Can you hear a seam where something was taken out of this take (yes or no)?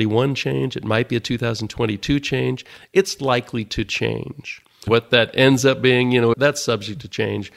yes